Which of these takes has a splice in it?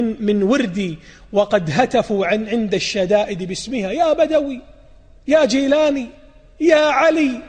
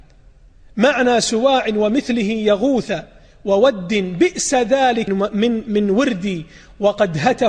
second; 1 cut; at 5.1 s

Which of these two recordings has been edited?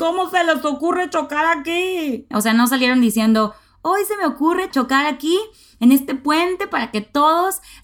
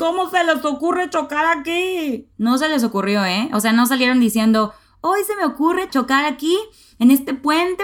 first; 1 cut; at 2.3 s

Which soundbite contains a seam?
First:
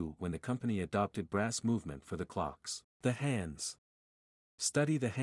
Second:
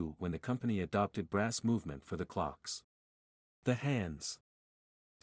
first; 1 cut; at 2.9 s

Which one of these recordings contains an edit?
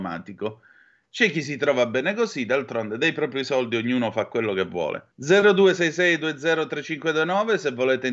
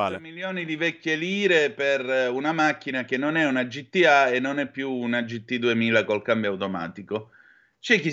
first; 1 cut; at 5.1 s

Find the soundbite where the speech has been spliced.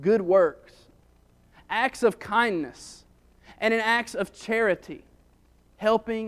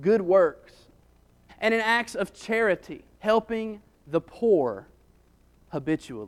second; 2 cuts; at 1.5 s, 3.1 s

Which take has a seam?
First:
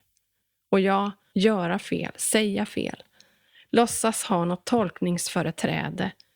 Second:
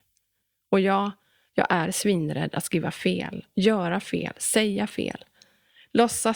first; 1 cut; at 1.3 s

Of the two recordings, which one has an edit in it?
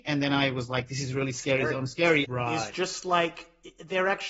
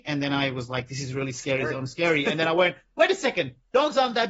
first; 1 cut; at 2.2 s

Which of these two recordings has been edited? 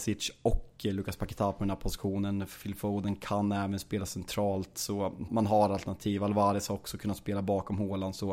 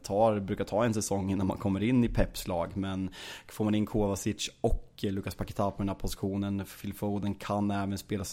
first; 1 cut; at 5.3 s

